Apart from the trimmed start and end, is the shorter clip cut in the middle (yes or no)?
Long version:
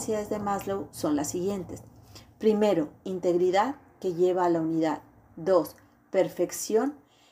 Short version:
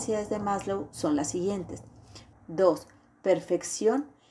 yes